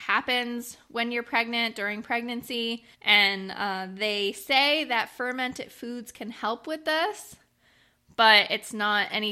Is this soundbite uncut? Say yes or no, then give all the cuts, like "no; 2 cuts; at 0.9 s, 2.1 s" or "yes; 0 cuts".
no; 1 cut; at 2.9 s